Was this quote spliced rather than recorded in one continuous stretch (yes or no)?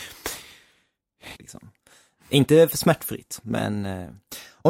yes